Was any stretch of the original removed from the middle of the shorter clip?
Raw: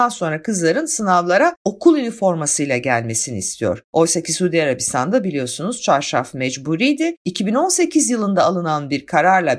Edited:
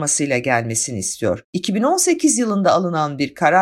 yes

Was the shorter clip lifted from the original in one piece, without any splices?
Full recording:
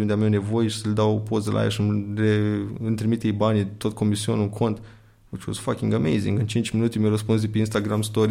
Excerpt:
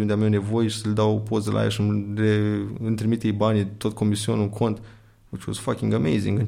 yes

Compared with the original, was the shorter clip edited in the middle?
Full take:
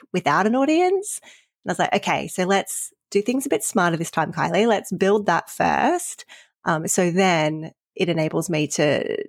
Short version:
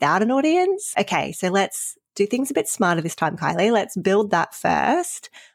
yes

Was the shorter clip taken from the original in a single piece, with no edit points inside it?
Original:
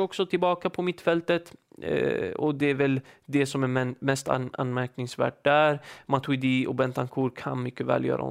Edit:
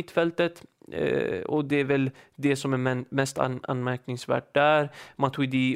yes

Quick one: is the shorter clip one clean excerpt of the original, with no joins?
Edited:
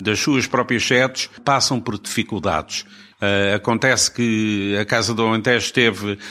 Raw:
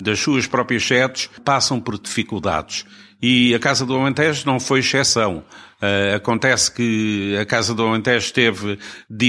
no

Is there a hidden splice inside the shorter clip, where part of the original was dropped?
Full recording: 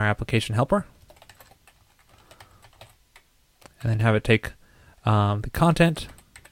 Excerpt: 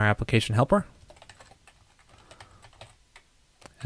no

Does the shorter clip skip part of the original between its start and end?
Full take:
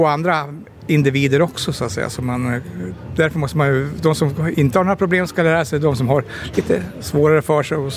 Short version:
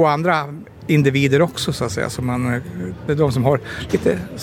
yes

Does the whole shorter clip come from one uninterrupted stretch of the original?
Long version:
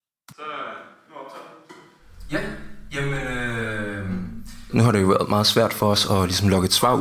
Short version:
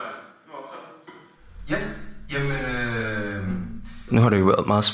yes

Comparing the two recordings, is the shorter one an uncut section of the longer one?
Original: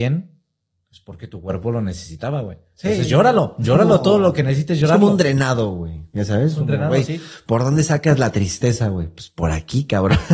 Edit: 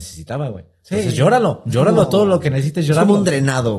yes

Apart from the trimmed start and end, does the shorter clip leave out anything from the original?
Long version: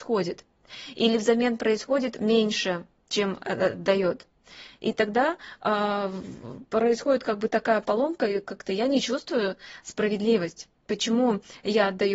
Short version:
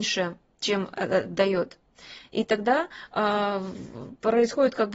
no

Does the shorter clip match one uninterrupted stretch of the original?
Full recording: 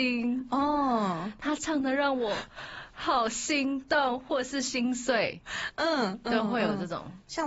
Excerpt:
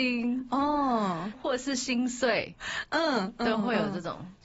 no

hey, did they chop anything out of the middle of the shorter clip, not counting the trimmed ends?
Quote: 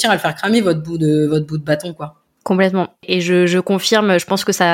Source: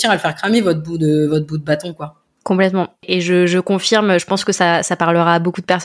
no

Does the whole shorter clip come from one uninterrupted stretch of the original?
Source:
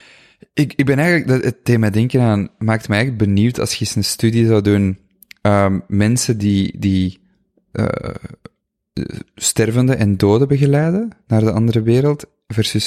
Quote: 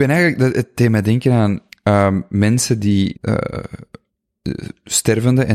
no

